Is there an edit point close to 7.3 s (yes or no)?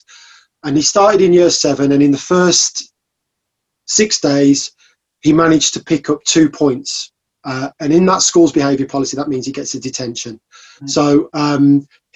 no